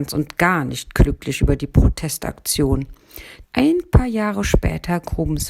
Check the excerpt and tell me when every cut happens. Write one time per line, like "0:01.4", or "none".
0:03.4